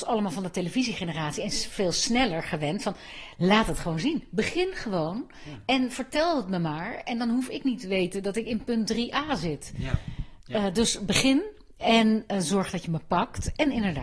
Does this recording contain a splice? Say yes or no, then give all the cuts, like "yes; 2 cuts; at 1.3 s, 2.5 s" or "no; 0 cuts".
no; 0 cuts